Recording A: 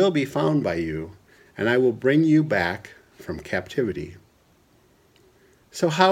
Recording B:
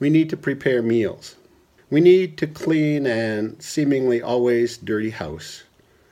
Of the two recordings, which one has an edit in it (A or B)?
B